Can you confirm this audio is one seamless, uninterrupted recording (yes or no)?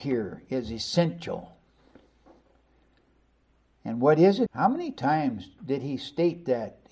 no